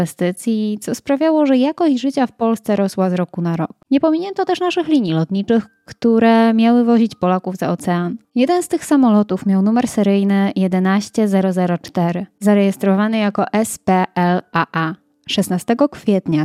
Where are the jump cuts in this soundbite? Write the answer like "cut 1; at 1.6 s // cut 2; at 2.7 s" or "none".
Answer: cut 1; at 8.2 s